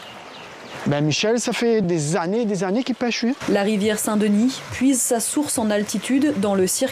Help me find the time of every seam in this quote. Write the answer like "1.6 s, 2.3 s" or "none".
1.8 s, 3.4 s